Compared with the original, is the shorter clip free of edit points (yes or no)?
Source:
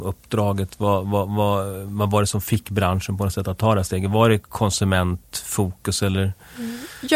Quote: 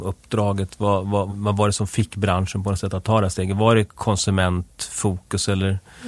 no